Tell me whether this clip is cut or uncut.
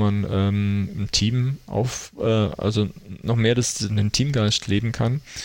uncut